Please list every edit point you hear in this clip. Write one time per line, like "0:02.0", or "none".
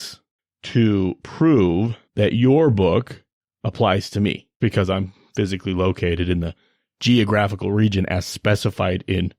0:02.1
0:04.6